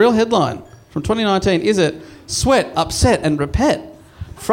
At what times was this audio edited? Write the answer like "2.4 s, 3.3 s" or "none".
2.7 s